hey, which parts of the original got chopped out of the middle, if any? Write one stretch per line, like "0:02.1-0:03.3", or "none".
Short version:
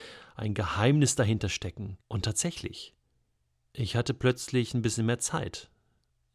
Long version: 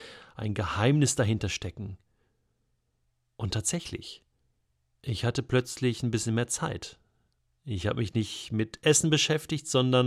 0:02.0-0:03.3

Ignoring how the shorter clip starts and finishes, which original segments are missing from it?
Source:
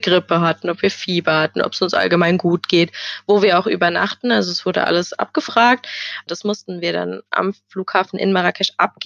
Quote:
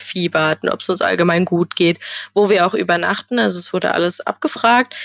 none

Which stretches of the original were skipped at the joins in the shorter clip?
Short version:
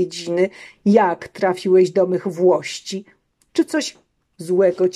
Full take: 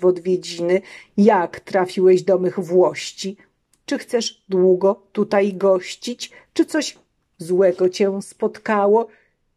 0:03.8-0:06.5

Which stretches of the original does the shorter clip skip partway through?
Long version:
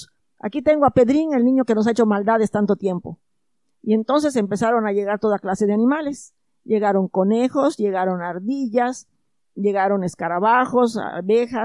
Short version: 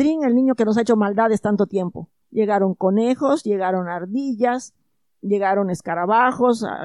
0:03.3-0:06.6

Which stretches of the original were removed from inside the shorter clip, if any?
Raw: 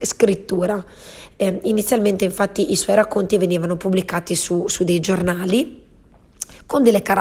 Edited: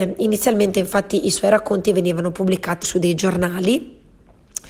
0:04.3-0:04.7

